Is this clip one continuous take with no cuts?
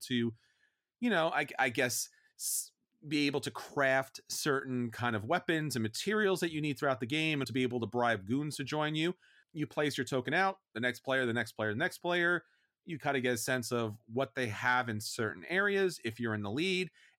no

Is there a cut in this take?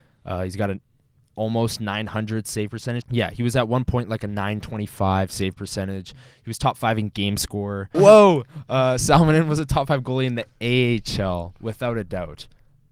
yes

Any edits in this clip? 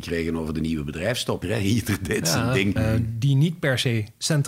yes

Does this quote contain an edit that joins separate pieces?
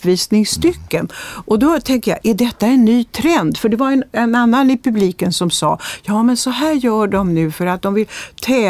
no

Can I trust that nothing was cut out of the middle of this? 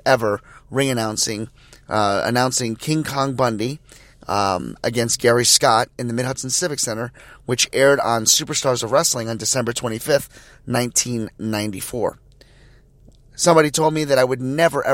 yes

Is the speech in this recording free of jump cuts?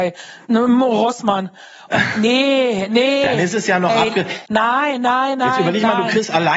yes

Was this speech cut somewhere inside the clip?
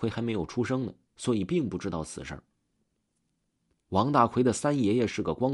no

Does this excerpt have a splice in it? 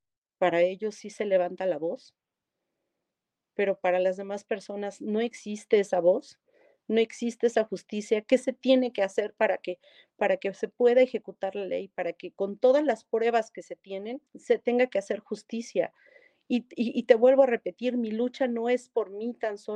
yes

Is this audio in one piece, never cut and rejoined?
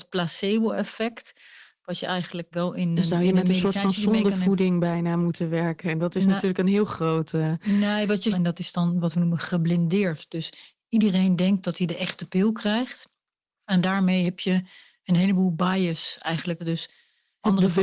no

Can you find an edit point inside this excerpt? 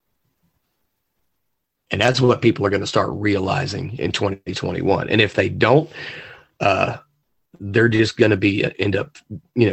no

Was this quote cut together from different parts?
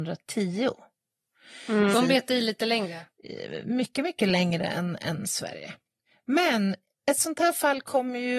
yes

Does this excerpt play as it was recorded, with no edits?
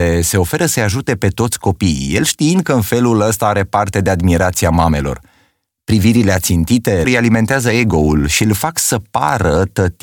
no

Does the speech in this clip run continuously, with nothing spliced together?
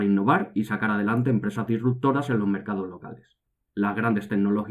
no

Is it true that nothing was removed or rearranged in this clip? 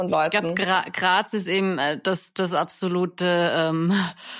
yes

